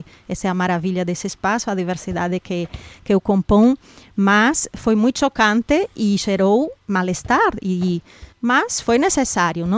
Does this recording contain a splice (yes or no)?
yes